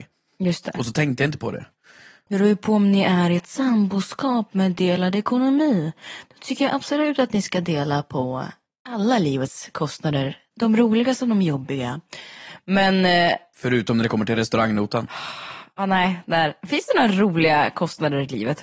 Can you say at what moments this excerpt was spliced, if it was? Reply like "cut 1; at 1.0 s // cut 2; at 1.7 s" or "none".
cut 1; at 2.3 s